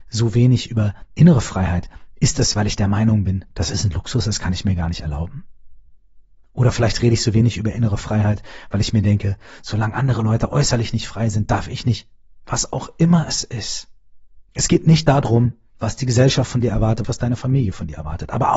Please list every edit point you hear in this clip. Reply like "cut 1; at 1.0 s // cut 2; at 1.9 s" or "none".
cut 1; at 14.5 s // cut 2; at 17.0 s

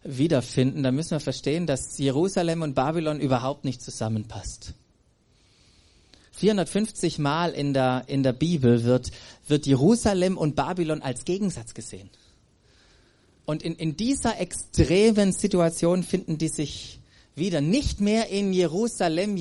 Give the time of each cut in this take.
none

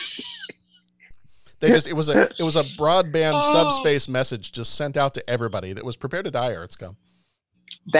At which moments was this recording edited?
none

